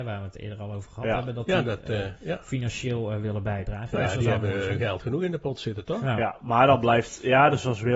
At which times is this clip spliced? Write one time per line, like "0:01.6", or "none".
none